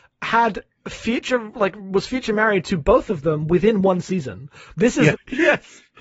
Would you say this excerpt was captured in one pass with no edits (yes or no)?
no